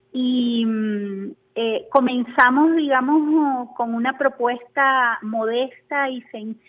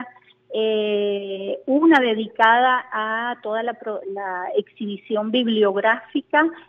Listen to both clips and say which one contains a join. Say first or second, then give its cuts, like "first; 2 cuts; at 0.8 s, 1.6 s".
second; 1 cut; at 4.0 s